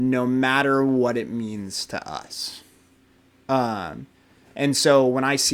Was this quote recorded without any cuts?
yes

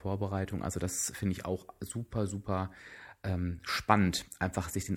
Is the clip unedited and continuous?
yes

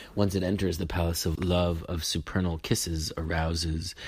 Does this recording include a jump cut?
yes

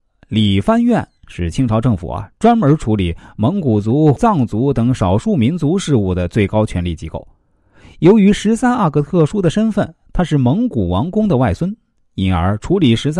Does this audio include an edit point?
yes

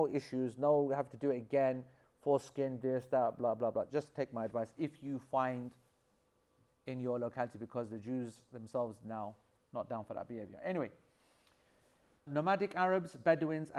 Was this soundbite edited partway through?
yes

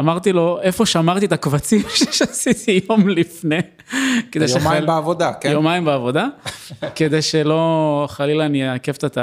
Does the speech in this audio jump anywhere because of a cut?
no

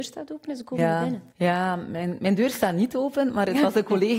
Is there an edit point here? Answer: yes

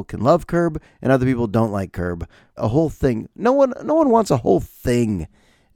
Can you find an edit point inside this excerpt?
yes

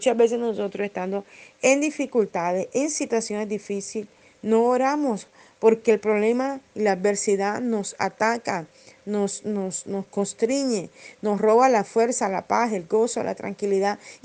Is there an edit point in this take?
no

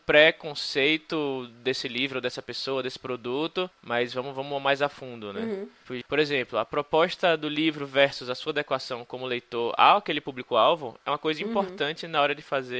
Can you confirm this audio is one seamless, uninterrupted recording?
no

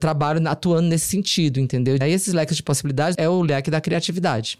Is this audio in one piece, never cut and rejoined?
no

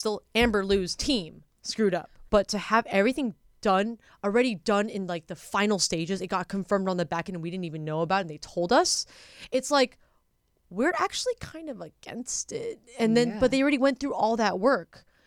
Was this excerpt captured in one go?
no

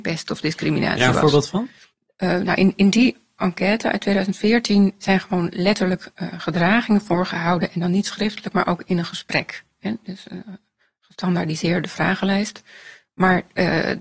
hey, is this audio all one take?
yes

